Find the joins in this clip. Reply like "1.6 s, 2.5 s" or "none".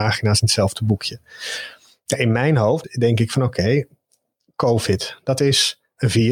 2.8 s